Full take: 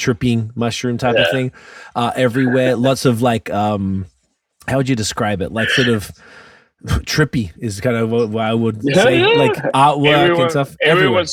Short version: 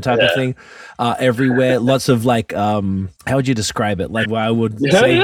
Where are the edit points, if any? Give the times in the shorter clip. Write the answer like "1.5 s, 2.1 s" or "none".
3.2 s, 4.2 s